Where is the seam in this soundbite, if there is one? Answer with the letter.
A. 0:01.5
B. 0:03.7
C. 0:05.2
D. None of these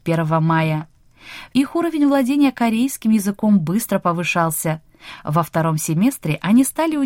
A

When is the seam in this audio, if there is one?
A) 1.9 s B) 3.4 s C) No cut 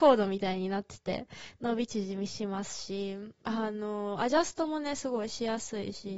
B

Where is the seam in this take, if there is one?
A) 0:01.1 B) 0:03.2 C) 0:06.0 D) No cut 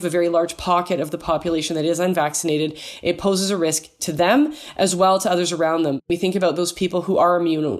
D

